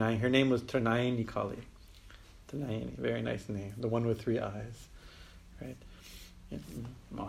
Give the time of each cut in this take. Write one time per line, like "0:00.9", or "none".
none